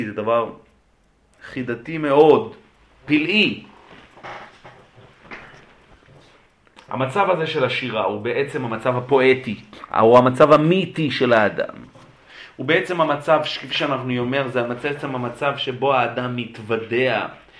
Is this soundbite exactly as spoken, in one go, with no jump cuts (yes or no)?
yes